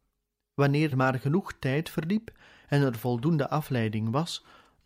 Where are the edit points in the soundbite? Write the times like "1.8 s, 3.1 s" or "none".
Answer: 0.9 s